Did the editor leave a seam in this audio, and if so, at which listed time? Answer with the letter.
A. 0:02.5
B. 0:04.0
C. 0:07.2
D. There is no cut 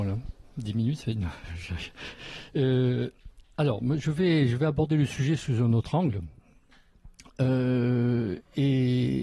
D